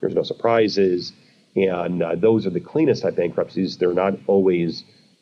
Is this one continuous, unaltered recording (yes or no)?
yes